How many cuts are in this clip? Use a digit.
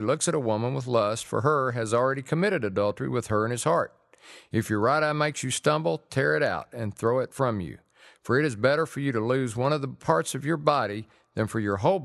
0